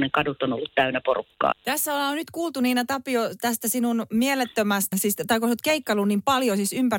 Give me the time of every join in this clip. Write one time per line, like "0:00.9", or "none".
0:01.5
0:04.9